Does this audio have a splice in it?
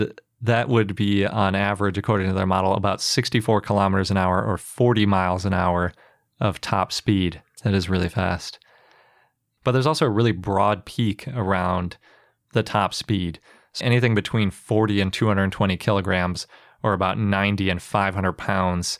yes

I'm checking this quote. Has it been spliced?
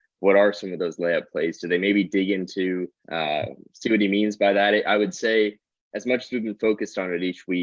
yes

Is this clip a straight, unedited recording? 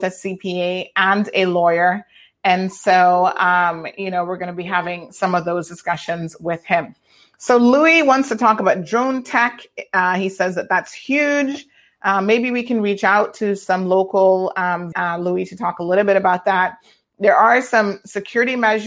no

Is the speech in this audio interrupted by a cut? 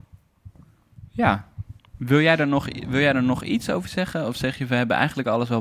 no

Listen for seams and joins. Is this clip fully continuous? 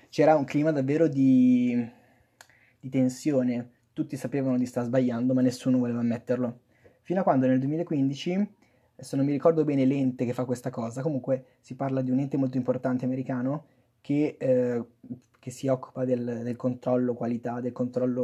yes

